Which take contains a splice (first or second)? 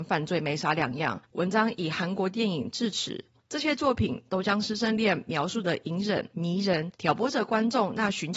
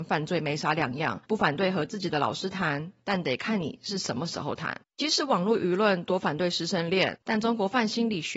first